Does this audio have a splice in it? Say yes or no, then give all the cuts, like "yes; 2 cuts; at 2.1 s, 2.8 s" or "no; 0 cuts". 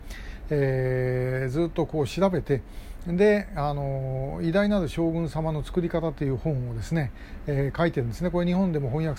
no; 0 cuts